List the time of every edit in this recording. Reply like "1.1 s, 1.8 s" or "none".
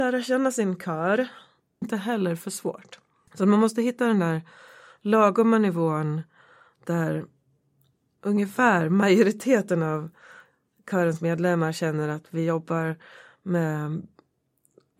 1.8 s